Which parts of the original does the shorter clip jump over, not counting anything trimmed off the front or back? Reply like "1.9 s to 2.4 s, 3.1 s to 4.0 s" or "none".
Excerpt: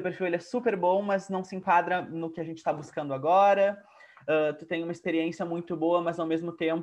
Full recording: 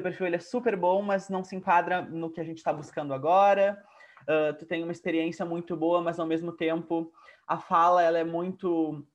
none